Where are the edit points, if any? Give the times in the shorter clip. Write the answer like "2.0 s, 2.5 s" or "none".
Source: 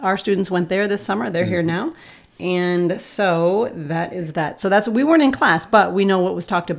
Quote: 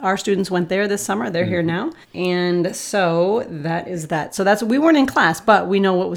2.0 s